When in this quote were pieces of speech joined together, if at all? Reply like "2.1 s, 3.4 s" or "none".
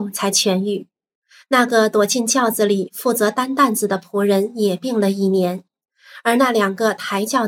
none